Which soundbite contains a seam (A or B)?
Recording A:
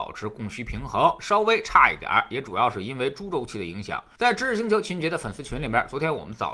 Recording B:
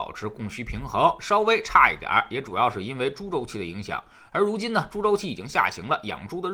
A